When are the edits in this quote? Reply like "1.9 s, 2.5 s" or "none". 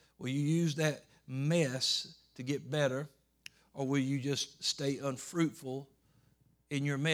none